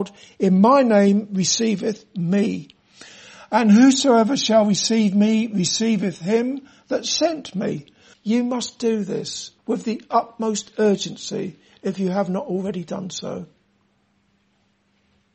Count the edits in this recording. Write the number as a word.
two